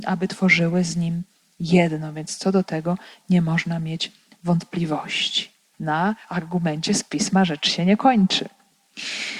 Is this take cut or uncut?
cut